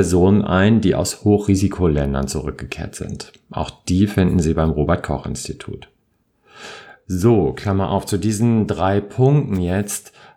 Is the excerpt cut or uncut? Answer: uncut